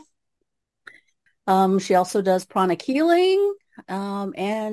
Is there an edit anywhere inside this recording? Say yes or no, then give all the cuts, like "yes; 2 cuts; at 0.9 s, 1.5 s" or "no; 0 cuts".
yes; 1 cut; at 1.3 s